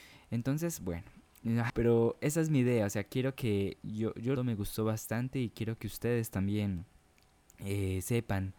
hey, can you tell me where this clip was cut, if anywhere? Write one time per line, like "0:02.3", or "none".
0:01.7
0:04.4